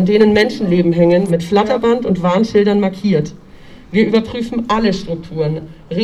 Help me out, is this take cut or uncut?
cut